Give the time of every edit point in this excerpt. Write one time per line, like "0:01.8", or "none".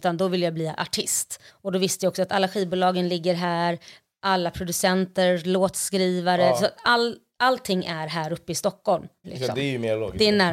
0:01.5
0:09.2